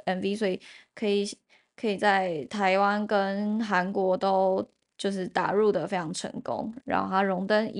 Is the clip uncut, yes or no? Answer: no